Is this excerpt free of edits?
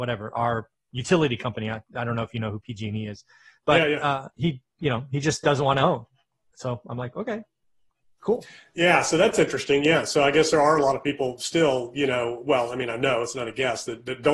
yes; 0 cuts

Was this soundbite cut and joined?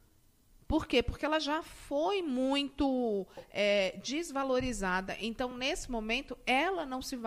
no; 0 cuts

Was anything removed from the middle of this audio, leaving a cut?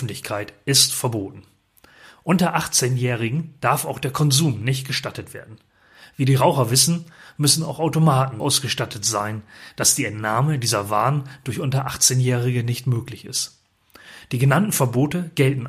yes; 1 cut; at 8.4 s

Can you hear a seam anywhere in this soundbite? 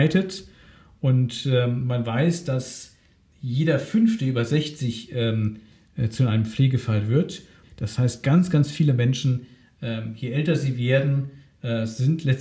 yes; 1 cut; at 7.6 s

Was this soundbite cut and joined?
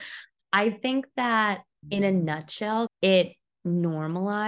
yes; 2 cuts; at 1.8 s, 2.9 s

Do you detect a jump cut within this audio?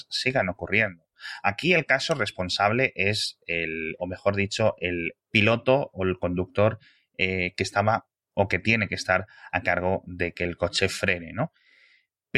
yes; 2 cuts; at 4.0 s, 5.2 s

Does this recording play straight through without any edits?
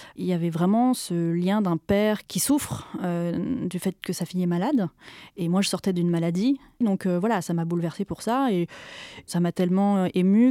no; 1 cut; at 6.8 s

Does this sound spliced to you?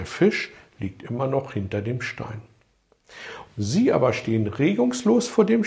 yes; 1 cut; at 3.5 s

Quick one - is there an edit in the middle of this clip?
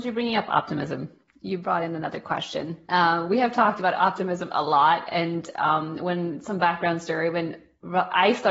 no; 0 cuts

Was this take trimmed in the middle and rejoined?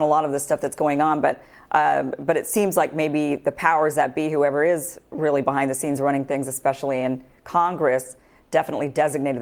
no; 0 cuts

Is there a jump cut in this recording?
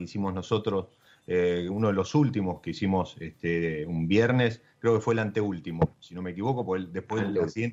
no; 0 cuts

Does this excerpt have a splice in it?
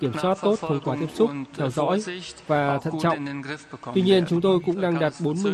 no; 0 cuts

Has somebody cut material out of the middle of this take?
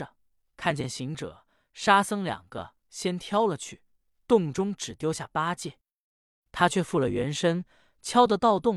no; 0 cuts

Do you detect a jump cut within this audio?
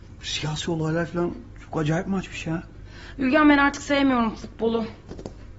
no; 0 cuts

